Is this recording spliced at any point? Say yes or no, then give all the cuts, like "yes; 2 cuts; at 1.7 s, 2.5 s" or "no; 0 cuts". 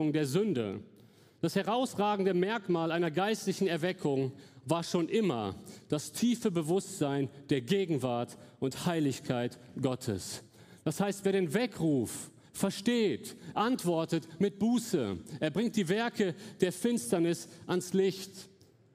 no; 0 cuts